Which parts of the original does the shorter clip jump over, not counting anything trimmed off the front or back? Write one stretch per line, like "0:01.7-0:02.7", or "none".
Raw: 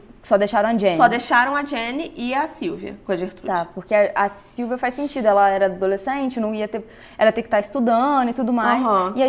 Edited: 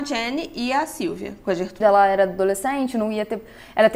0:03.4-0:05.2